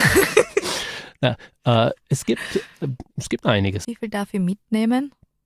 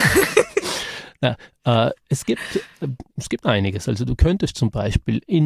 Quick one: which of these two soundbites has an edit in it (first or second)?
first